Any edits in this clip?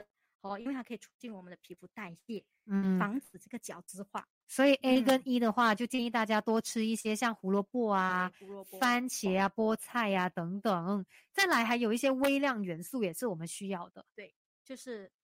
no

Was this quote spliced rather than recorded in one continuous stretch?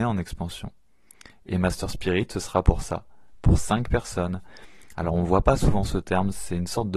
no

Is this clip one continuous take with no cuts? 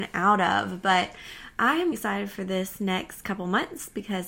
no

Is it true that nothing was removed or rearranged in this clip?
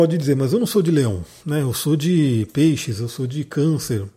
yes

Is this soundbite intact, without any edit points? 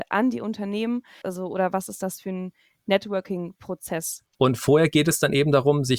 no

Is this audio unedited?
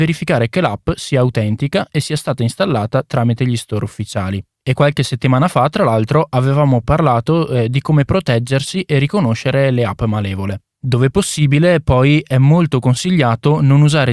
no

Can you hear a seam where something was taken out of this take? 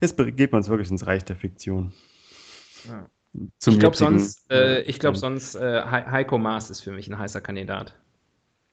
no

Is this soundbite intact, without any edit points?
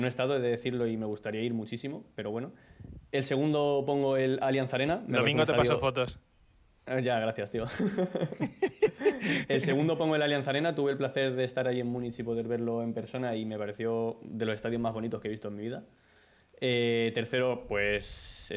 yes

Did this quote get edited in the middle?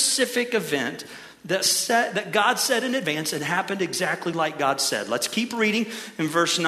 no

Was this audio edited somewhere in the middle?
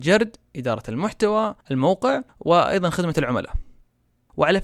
no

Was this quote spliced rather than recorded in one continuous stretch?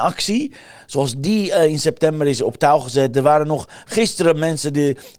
no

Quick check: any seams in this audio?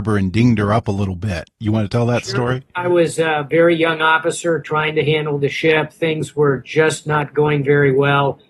no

